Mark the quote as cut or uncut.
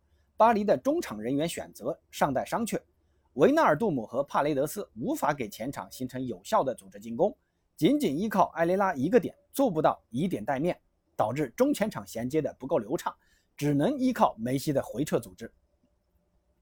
uncut